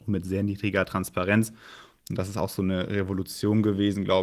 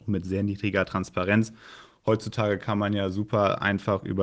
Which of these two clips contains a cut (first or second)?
first